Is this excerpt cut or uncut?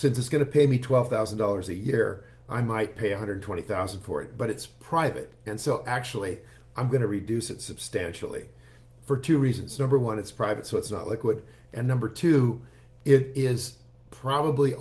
uncut